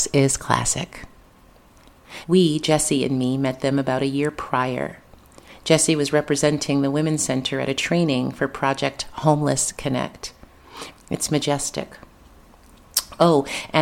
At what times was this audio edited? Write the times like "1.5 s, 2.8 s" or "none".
2.2 s, 10.9 s